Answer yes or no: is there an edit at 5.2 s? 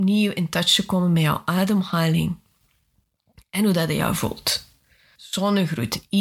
yes